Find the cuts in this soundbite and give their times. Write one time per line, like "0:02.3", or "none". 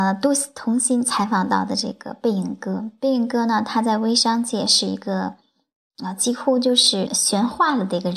0:07.1